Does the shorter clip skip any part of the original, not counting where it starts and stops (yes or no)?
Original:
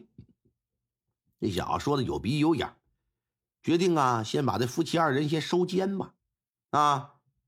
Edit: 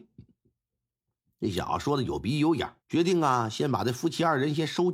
yes